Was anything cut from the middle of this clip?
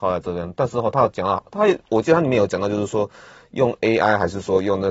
no; 0 cuts

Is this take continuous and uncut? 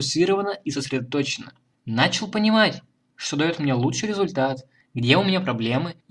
yes; 0 cuts

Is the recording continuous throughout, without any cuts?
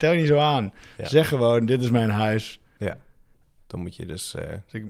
no; 1 cut; at 3.6 s

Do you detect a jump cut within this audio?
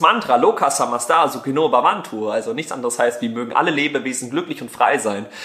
no; 0 cuts

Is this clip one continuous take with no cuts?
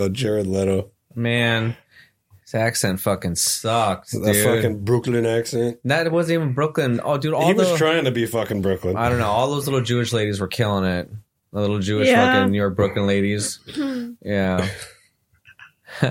yes; 0 cuts

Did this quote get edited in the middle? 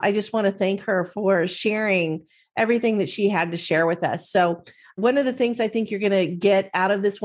no; 0 cuts

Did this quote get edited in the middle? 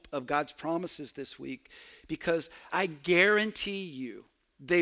yes; 1 cut; at 2.7 s

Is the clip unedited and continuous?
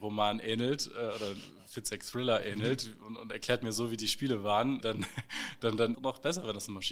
no; 2 cuts; at 4.8 s, 5.9 s

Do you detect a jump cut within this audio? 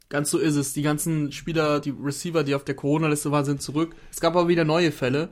no; 0 cuts

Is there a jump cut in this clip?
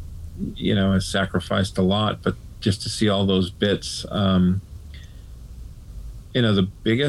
no; 0 cuts

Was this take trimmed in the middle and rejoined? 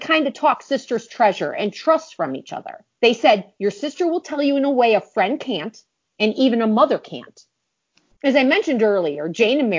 yes; 2 cuts; at 3.0 s, 8.1 s

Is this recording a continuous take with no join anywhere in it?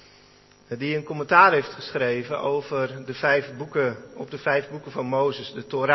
yes; 0 cuts

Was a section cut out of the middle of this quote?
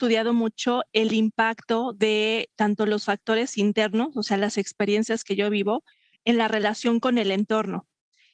no; 0 cuts

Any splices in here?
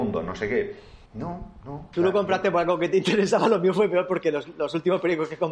yes; 1 cut; at 1.1 s

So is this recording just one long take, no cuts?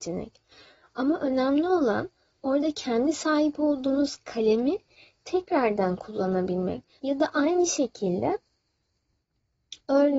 no; 1 cut; at 7.0 s

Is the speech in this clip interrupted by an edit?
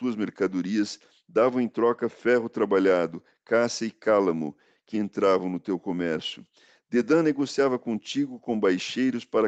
yes; 1 cut; at 4.9 s

